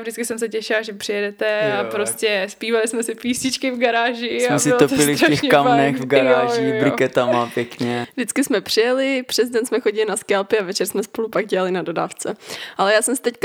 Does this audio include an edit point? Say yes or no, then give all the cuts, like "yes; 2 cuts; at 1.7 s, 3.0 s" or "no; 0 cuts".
no; 0 cuts